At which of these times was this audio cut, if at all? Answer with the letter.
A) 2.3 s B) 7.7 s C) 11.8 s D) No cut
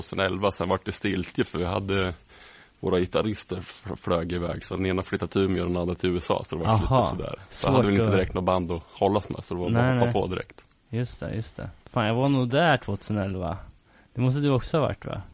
D